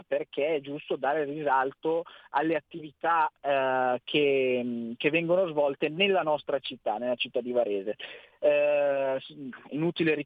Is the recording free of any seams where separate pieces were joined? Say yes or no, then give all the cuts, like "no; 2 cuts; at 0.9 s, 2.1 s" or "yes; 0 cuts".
yes; 0 cuts